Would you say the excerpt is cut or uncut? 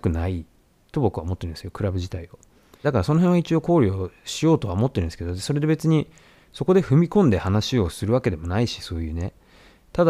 cut